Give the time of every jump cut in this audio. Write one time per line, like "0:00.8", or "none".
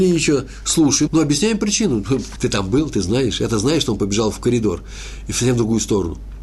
0:01.1
0:02.4